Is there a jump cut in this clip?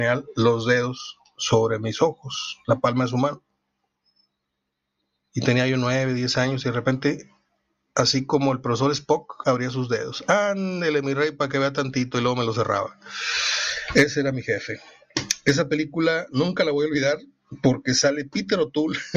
yes; 1 cut; at 9.4 s

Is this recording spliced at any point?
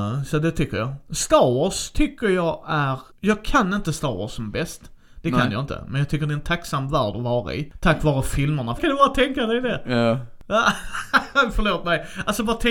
yes; 1 cut; at 8.8 s

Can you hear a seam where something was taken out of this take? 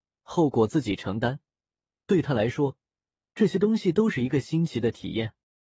no; 0 cuts

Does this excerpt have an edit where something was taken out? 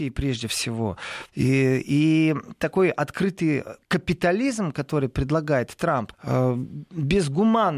yes; 2 cuts; at 3.8 s, 6.1 s

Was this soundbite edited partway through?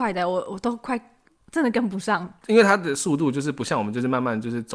no; 0 cuts

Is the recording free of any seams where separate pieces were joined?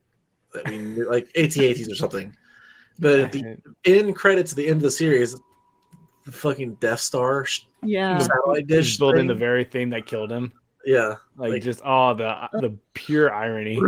yes; 0 cuts

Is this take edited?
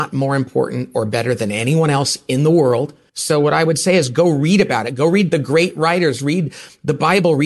yes; 1 cut; at 3.1 s

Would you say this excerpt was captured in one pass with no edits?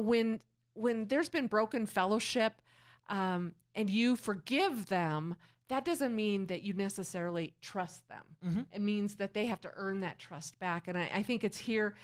yes; 0 cuts

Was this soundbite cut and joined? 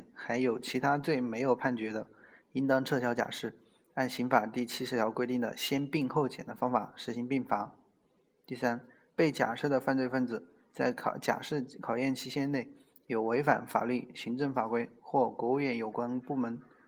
no; 0 cuts

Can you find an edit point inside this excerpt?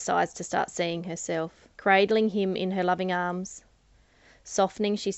yes; 1 cut; at 1.7 s

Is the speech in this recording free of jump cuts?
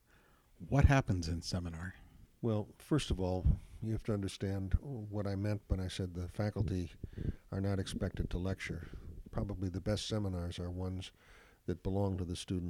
no; 1 cut; at 2.3 s

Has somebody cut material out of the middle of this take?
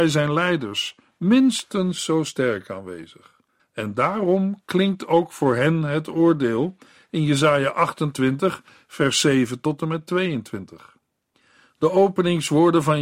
yes; 1 cut; at 3.6 s

